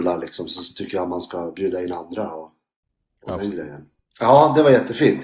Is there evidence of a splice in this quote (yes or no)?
yes